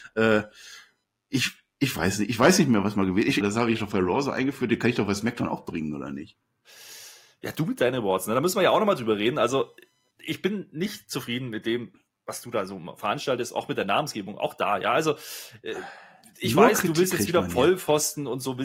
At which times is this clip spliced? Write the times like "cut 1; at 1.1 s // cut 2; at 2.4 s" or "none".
cut 1; at 3.4 s